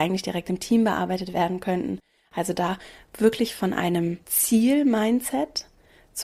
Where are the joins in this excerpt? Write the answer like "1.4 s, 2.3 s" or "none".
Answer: 4.2 s

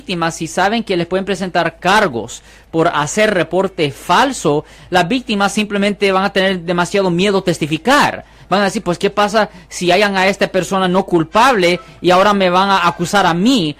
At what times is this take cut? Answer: none

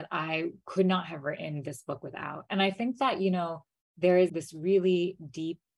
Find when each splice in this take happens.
none

